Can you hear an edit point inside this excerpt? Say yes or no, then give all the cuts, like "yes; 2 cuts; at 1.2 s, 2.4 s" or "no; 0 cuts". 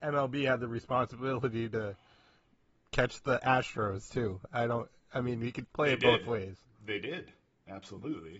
no; 0 cuts